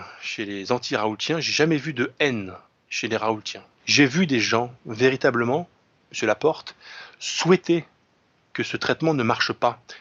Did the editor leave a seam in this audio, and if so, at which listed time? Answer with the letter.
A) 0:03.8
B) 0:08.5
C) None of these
A